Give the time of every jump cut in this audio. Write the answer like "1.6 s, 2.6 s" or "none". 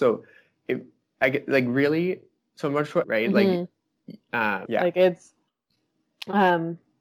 3.0 s, 4.7 s